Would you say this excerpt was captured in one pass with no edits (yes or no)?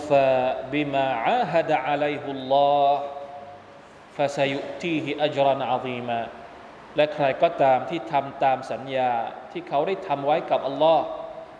yes